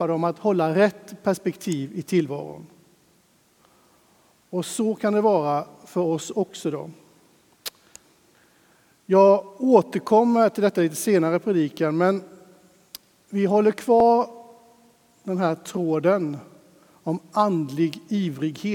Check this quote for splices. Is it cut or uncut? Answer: uncut